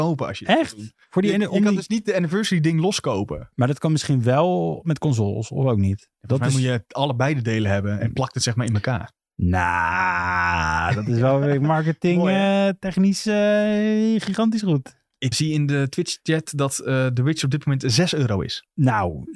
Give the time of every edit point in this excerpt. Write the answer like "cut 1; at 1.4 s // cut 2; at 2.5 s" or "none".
cut 1; at 15.3 s

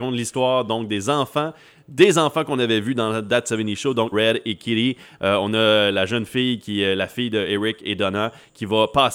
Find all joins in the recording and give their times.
cut 1; at 4.1 s

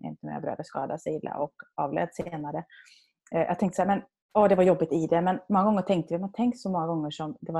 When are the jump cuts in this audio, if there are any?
none

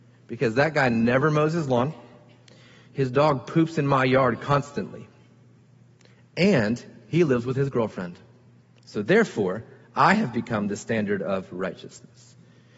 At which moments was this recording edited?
none

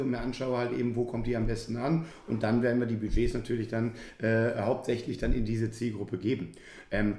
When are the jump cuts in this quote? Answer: none

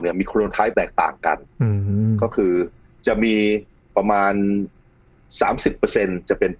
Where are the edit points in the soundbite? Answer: cut 1; at 1.5 s

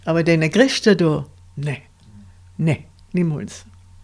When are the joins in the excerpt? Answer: none

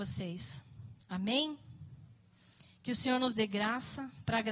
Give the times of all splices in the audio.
cut 1; at 1.0 s

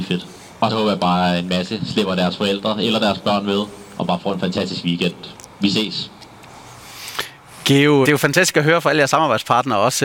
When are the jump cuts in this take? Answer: cut 1; at 8.0 s

